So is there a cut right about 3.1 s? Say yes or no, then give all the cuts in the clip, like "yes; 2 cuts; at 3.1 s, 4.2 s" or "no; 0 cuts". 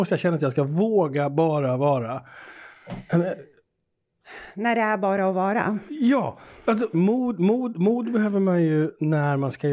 no; 1 cut; at 6.9 s